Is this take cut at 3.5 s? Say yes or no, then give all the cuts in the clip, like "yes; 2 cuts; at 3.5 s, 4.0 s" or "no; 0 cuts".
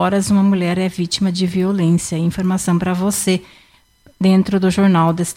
no; 0 cuts